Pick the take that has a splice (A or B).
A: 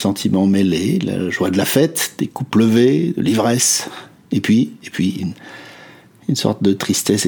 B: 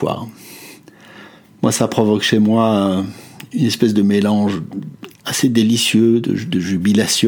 A